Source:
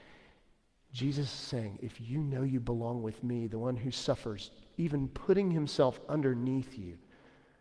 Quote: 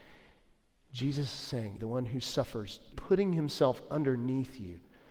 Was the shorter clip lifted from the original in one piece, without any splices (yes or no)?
no